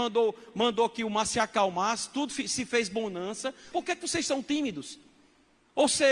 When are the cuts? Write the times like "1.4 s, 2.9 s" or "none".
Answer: 3.7 s